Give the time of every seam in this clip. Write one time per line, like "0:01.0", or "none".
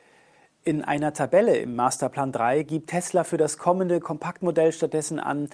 none